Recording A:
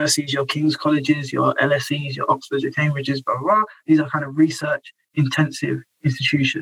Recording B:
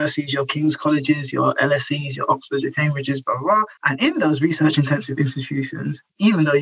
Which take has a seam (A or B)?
B